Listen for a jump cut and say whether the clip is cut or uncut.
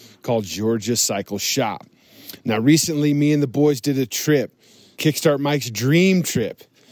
cut